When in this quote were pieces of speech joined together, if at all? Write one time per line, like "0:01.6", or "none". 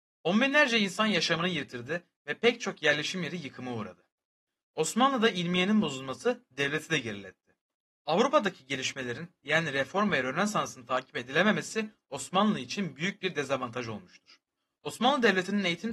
none